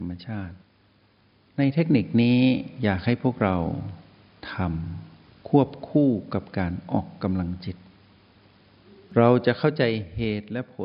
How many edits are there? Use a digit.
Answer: 0